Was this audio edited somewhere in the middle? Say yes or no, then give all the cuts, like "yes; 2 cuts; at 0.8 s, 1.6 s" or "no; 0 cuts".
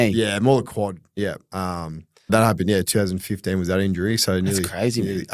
yes; 1 cut; at 2.3 s